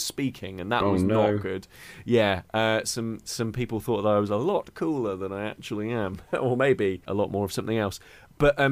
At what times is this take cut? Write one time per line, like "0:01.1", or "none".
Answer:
0:07.1